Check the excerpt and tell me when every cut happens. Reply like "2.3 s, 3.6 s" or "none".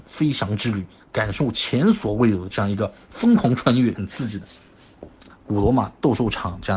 3.9 s, 5.3 s